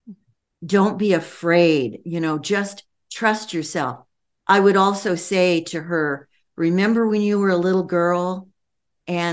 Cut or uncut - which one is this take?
uncut